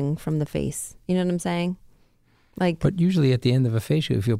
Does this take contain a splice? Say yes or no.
no